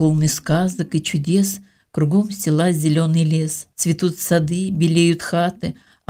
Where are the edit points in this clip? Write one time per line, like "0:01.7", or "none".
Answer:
0:03.7